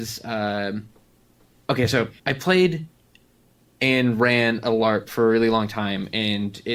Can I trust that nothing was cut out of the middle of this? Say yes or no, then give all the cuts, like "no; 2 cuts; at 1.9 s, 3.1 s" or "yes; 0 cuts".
no; 1 cut; at 2.2 s